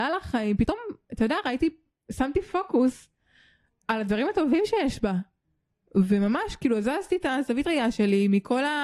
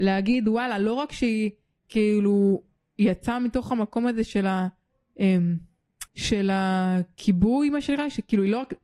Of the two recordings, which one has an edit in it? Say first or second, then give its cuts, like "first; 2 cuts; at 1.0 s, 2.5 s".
second; 1 cut; at 6.1 s